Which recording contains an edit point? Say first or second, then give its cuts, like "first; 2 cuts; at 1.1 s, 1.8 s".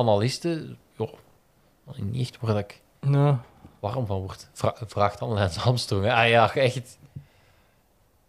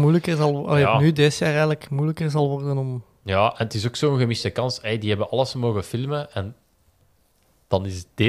first; 1 cut; at 0.9 s